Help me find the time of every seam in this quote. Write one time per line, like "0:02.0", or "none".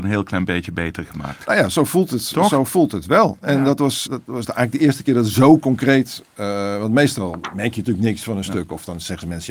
0:04.1

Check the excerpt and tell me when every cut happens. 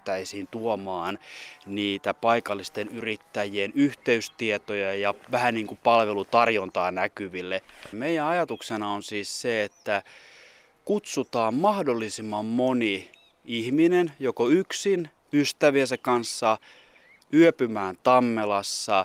0:07.9
0:15.2
0:17.2

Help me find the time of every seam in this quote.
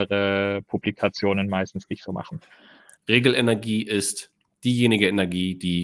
0:03.0

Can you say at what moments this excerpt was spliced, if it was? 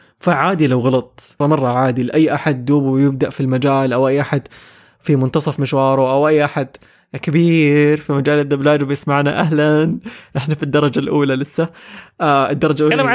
0:01.4

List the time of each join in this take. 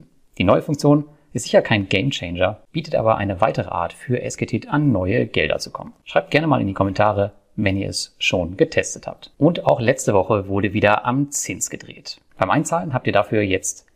0:09.3
0:12.3

